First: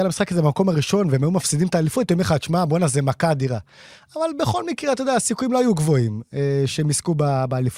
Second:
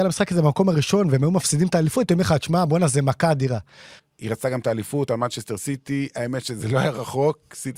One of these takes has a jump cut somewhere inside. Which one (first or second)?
second